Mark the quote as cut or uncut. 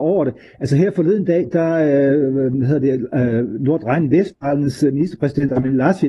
uncut